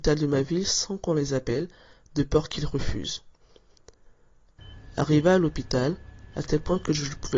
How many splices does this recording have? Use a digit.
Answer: 1